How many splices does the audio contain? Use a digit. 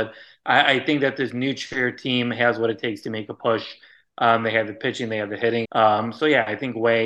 1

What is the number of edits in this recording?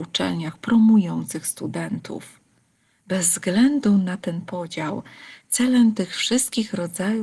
1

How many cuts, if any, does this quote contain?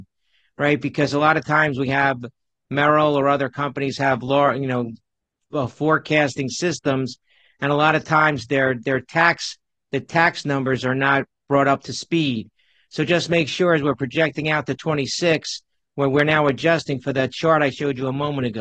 0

